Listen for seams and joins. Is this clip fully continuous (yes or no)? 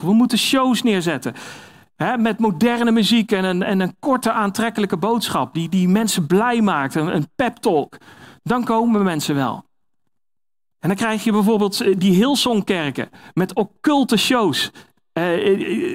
yes